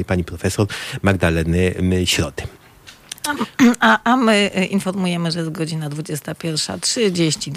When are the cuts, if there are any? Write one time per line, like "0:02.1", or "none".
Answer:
none